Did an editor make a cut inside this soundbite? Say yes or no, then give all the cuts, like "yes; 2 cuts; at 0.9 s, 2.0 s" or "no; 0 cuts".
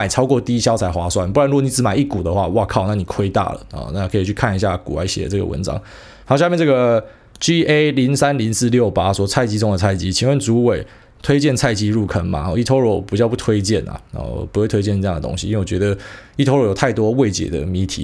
yes; 2 cuts; at 6.2 s, 11.1 s